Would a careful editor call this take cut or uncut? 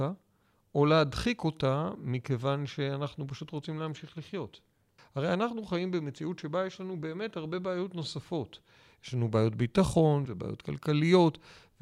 cut